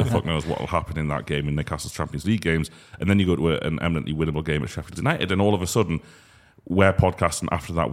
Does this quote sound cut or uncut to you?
uncut